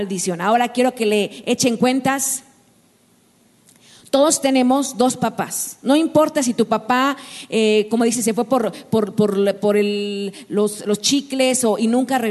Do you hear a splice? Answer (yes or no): no